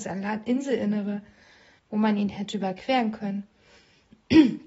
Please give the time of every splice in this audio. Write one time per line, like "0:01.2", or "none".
0:01.8